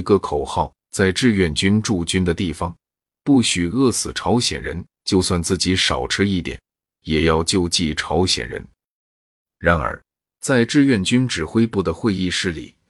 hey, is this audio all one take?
yes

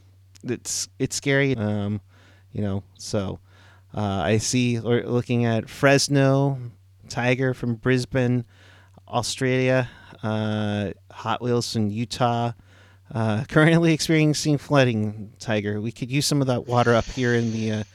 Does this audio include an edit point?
yes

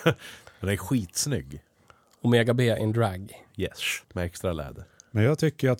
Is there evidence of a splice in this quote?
yes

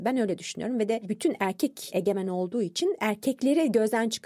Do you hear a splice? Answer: no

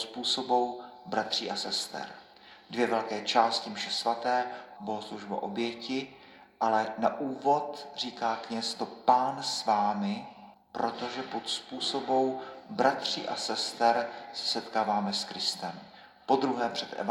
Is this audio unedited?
no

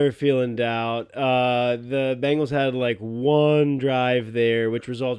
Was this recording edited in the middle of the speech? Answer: no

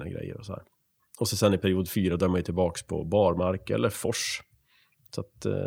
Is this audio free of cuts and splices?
yes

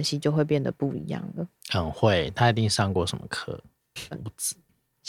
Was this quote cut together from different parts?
yes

